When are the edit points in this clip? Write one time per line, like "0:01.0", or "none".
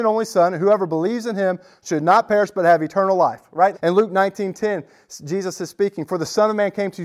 0:03.7